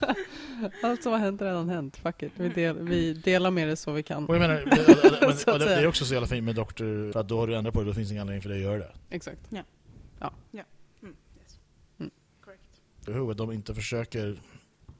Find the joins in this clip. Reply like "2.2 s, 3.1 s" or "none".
7.1 s, 10.1 s, 13.1 s